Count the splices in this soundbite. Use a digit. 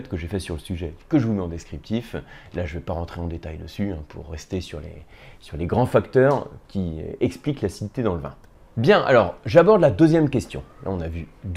0